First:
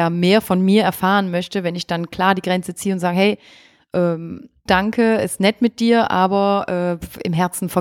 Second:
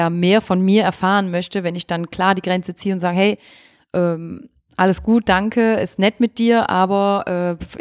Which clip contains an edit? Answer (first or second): first